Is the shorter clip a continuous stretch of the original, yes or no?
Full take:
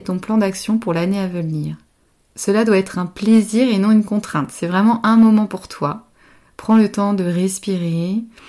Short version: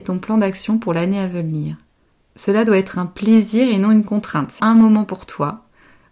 no